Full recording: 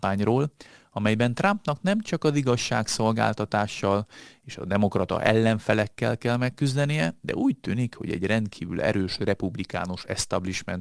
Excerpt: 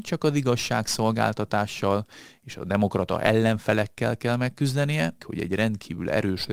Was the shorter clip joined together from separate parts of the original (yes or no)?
yes